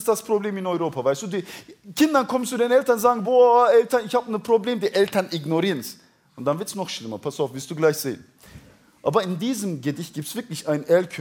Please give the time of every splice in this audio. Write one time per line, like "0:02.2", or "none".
none